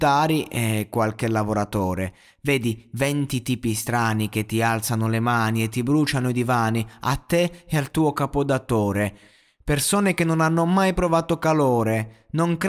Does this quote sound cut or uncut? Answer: uncut